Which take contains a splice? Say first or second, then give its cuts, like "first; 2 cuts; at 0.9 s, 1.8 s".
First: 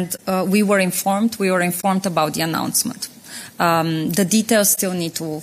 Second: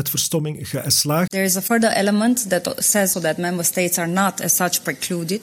second; 2 cuts; at 1.3 s, 3.1 s